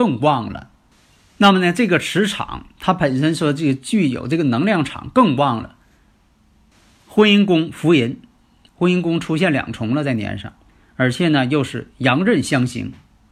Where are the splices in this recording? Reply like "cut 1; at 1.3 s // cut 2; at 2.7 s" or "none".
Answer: none